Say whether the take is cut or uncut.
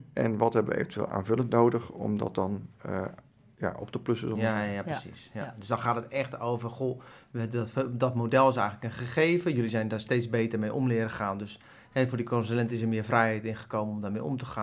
uncut